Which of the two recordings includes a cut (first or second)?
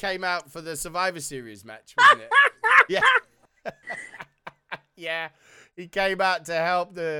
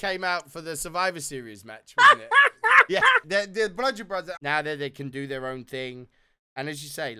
second